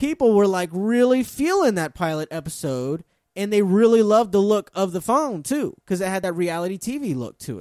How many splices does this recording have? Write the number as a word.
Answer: zero